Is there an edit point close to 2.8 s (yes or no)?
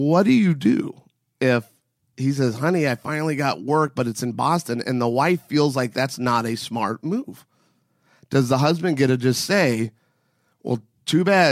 no